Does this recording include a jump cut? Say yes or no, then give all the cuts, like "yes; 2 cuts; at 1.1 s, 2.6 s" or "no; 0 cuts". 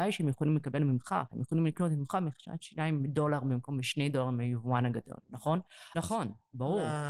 yes; 2 cuts; at 1.3 s, 5.9 s